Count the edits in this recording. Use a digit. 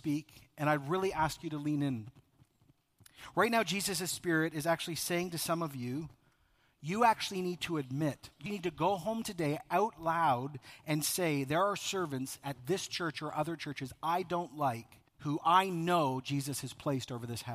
2